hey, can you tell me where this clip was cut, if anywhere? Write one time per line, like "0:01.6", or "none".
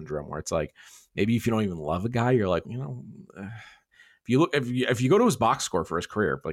0:02.6